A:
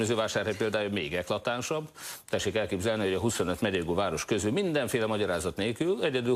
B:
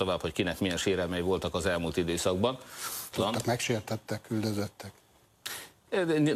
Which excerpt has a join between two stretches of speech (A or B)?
B